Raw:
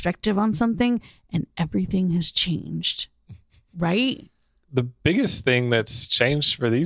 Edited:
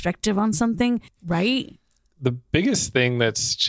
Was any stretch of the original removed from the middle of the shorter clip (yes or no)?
yes